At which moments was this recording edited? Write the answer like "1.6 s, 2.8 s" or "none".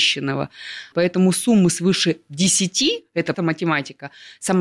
0.9 s, 3.3 s